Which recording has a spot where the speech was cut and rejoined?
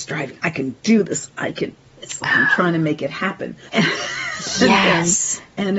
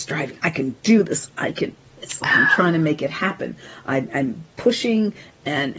first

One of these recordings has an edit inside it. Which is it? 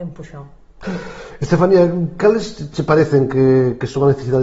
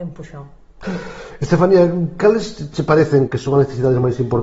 second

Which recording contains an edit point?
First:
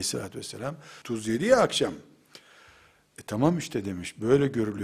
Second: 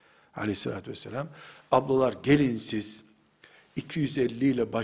first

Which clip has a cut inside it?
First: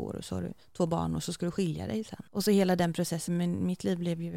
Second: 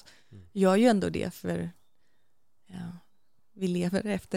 first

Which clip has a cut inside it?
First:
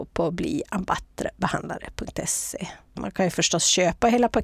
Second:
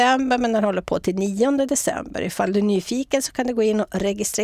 first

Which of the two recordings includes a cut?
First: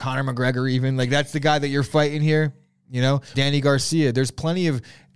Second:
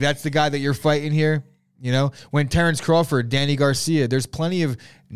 first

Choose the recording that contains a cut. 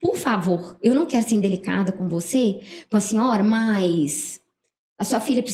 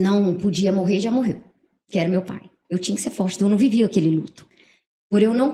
second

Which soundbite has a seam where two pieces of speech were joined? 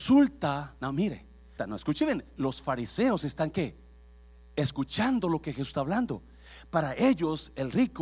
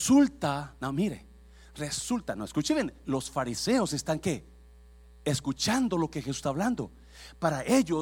first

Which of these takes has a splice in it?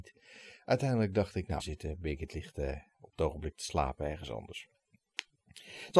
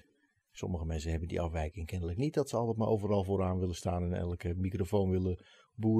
first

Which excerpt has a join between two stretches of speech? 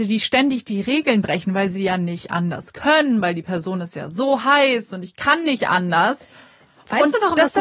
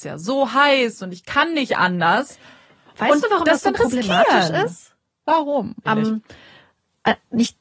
second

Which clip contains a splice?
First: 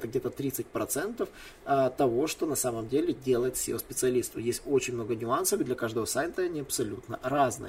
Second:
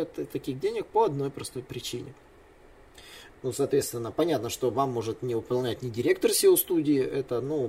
second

